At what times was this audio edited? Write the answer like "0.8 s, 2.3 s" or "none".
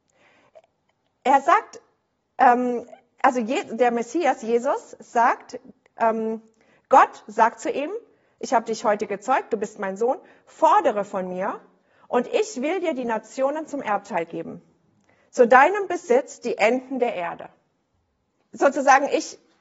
18.4 s

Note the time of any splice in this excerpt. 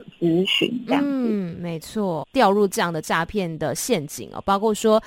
2.2 s

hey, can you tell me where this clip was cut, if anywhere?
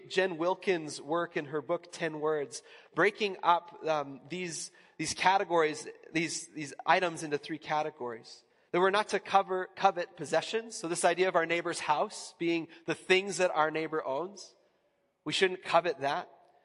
none

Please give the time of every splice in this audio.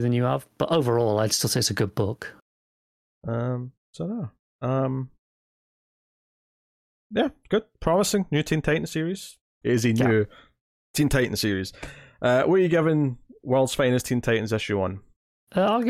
9.6 s

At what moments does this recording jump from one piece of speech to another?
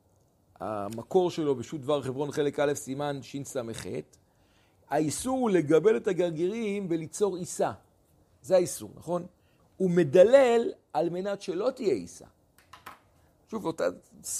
9.6 s

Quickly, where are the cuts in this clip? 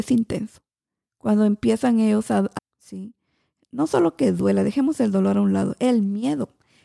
2.6 s

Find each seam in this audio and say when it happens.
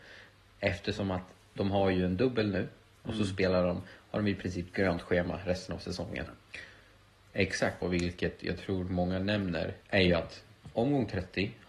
6.3 s, 7.8 s, 9.8 s

